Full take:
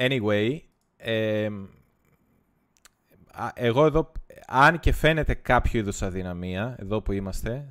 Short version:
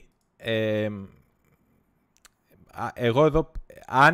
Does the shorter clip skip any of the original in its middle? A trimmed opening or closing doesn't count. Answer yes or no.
no